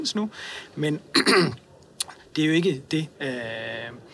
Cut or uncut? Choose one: cut